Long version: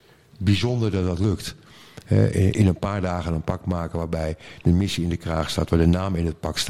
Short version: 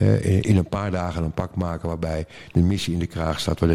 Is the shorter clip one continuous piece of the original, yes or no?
yes